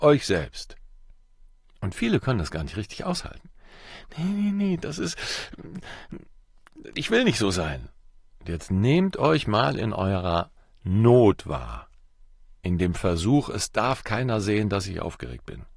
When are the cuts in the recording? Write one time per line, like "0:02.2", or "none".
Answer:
0:07.0